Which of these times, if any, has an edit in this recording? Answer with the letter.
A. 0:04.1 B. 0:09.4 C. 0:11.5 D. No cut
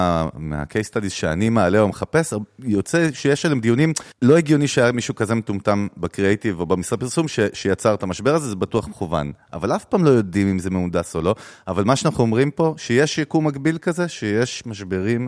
A